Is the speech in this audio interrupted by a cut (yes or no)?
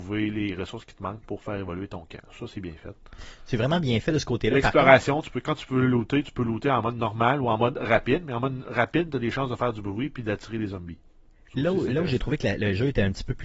no